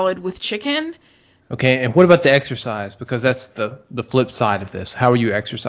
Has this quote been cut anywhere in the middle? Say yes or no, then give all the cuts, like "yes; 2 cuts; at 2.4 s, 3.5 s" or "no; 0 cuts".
yes; 2 cuts; at 1.4 s, 3.5 s